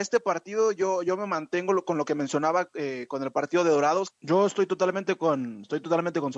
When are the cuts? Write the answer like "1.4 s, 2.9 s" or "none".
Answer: 4.1 s